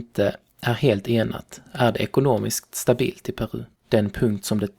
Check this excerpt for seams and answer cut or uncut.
cut